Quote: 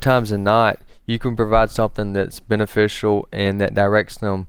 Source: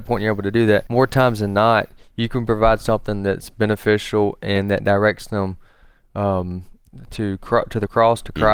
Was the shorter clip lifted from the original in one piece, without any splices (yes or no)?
yes